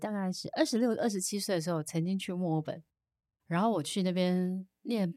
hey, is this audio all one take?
yes; 0 cuts

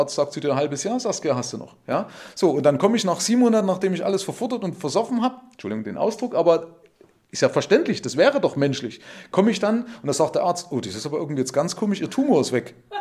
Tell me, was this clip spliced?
no; 0 cuts

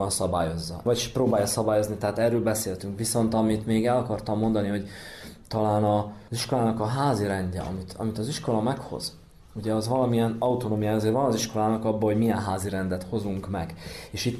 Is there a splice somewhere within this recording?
no; 0 cuts

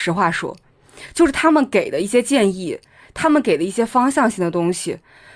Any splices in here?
no; 0 cuts

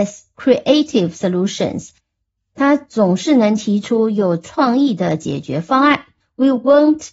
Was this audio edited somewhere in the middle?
yes; 1 cut; at 6.2 s

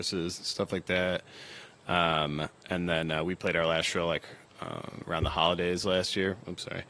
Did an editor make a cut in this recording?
no; 0 cuts

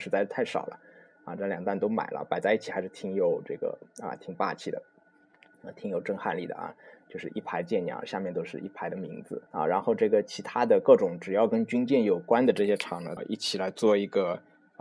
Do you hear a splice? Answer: yes; 2 cuts; at 9.5 s, 13.2 s

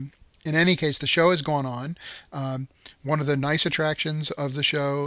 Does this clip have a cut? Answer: no; 0 cuts

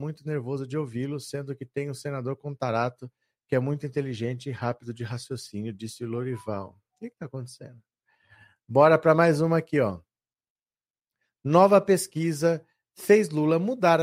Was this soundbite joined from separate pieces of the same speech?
no; 0 cuts

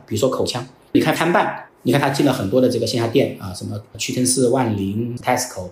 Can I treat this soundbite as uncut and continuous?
no; 1 cut; at 1.7 s

